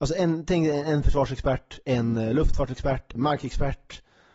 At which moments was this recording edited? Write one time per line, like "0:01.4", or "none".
0:03.1